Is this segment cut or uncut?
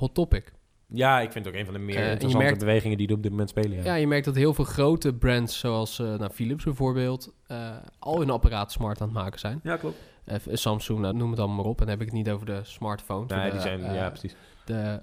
cut